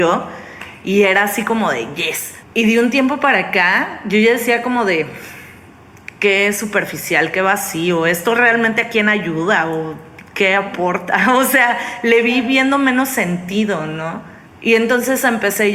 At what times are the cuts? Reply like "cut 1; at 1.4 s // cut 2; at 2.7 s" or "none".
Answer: none